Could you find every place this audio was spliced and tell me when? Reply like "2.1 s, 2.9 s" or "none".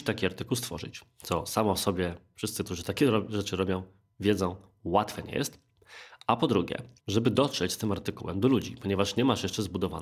7.0 s